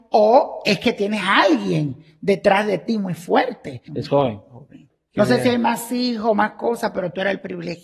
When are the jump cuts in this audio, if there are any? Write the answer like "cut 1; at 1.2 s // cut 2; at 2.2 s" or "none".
cut 1; at 3.9 s // cut 2; at 5.1 s